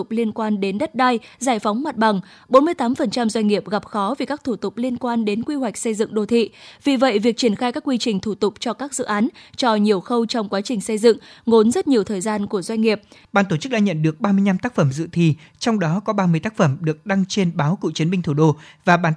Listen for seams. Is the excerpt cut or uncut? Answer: cut